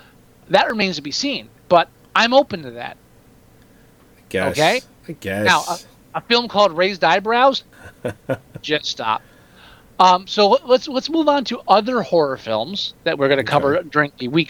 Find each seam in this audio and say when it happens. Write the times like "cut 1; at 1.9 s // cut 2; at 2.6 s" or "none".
cut 1; at 7.7 s